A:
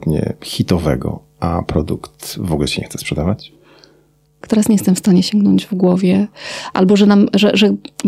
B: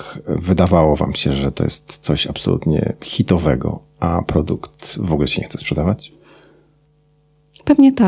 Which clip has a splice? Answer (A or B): A